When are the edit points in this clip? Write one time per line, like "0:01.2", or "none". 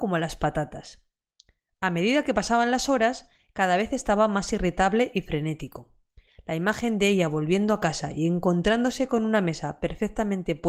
none

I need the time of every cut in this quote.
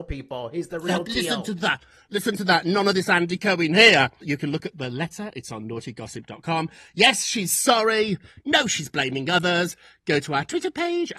0:04.2

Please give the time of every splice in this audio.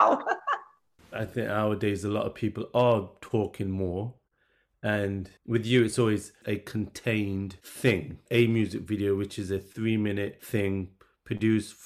0:05.4

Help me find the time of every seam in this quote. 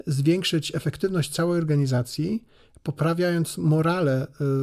none

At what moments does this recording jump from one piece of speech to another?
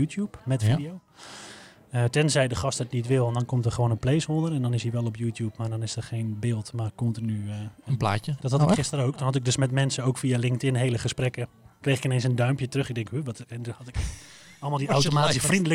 0:08.4

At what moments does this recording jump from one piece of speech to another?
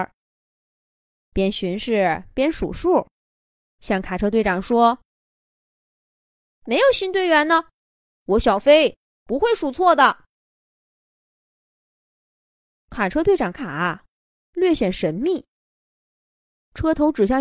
0:13.5

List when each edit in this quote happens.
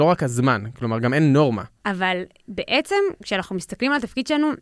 0:01.8

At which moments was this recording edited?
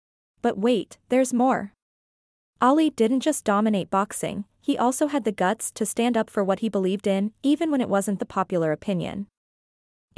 none

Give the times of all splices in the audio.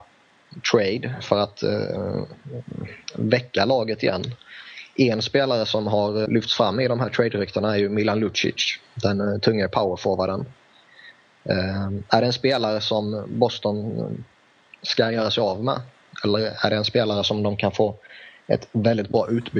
0:06.3

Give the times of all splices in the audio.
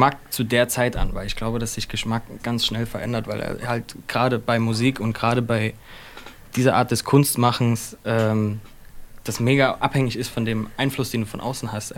0:02.4

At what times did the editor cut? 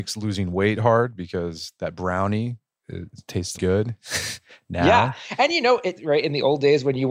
0:03.5
0:06.0

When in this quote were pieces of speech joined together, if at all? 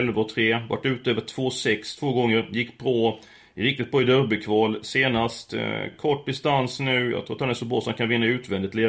none

